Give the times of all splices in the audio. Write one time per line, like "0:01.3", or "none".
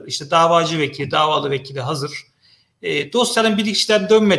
none